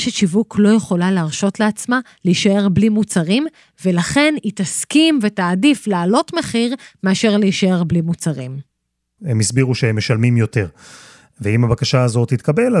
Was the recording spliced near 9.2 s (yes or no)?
yes